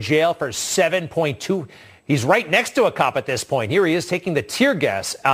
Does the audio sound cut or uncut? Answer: uncut